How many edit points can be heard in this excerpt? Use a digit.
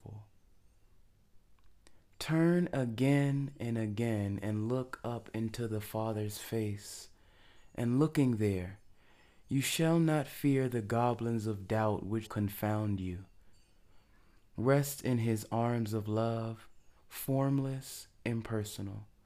2